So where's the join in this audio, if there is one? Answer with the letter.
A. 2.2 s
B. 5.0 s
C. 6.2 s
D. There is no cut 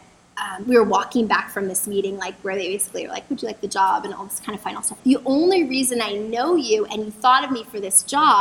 B